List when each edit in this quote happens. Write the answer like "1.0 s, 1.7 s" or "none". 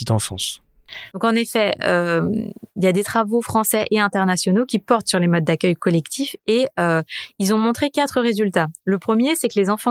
1.1 s